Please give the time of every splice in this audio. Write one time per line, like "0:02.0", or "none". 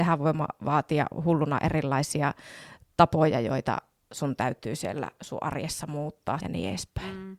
0:06.4